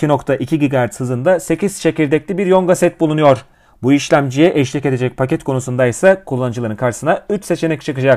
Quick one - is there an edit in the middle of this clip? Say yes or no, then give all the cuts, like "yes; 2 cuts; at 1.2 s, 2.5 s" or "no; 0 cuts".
no; 0 cuts